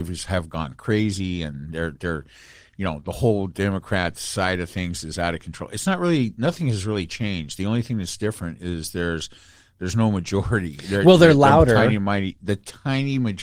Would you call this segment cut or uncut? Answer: uncut